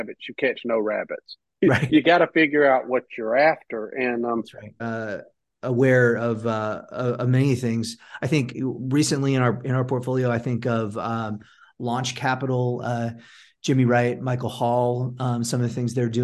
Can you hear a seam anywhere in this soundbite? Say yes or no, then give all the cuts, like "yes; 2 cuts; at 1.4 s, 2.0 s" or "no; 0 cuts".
yes; 1 cut; at 4.8 s